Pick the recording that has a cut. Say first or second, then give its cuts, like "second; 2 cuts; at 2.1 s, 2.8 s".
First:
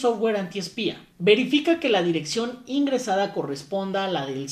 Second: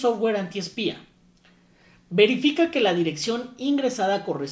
first; 1 cut; at 1.1 s